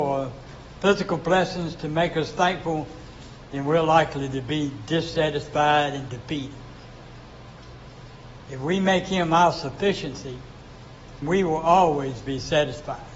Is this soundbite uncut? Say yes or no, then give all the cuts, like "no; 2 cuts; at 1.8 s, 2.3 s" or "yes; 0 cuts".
no; 2 cuts; at 8.5 s, 11.2 s